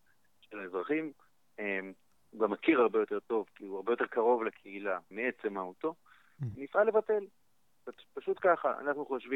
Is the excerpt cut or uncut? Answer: cut